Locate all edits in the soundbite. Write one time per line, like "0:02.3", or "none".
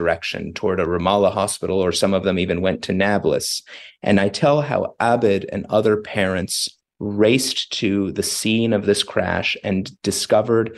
none